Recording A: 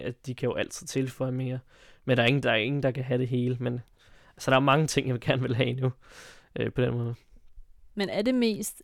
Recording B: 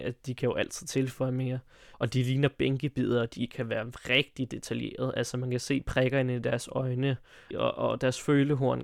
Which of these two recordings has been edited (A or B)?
B